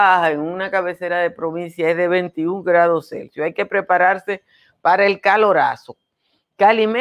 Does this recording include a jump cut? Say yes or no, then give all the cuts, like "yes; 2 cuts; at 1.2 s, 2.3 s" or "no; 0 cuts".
no; 0 cuts